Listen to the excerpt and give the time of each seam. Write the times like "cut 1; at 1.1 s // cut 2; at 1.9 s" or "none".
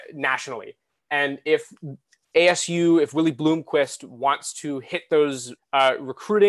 cut 1; at 5.6 s